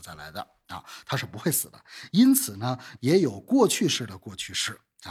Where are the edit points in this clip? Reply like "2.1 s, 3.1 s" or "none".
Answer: 3.0 s

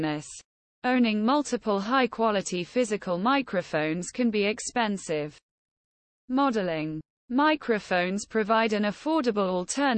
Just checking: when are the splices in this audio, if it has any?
none

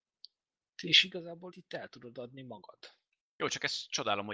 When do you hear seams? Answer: 1.5 s

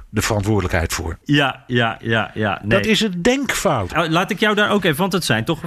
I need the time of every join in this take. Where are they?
1.2 s, 3.9 s

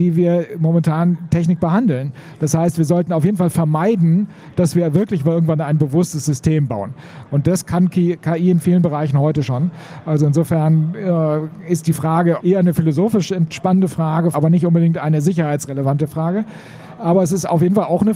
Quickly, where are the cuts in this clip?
7.3 s, 12.4 s, 14.3 s

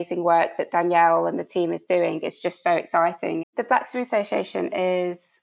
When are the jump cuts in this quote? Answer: 3.4 s

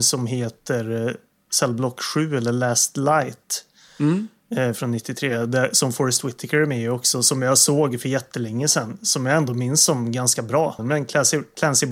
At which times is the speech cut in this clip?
10.8 s

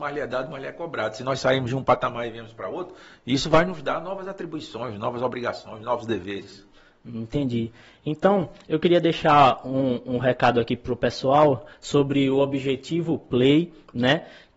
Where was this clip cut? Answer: none

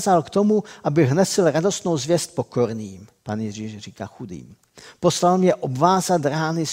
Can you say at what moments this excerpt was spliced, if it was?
3.2 s

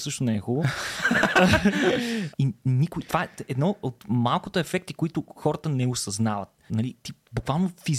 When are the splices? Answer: 2.3 s, 6.7 s

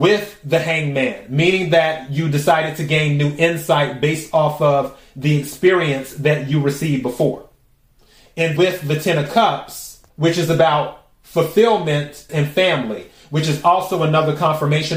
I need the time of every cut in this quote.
8.6 s, 10.1 s, 12.3 s

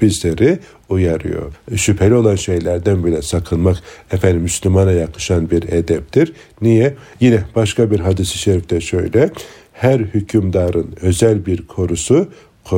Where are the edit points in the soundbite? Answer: 7.1 s

